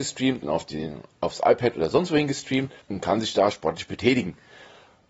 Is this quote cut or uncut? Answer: cut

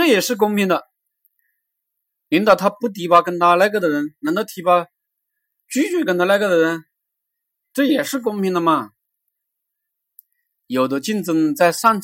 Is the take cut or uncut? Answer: uncut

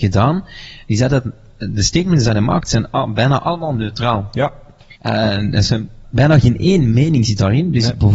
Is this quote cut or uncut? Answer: cut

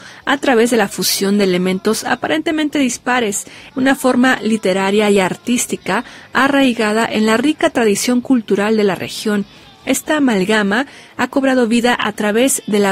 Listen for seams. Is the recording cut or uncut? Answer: cut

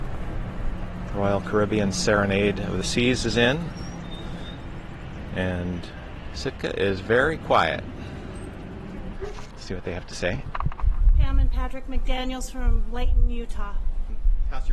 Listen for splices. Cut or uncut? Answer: cut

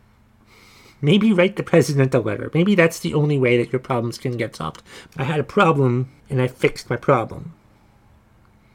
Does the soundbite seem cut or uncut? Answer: cut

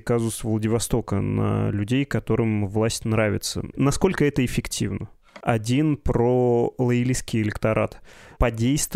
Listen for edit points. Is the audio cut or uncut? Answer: cut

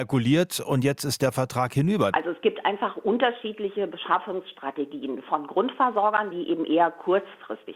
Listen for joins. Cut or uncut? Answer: cut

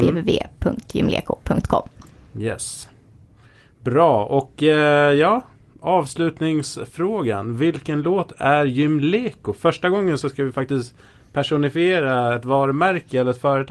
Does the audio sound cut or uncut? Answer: uncut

